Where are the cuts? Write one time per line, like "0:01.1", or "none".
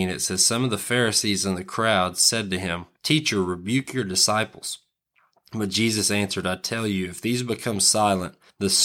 none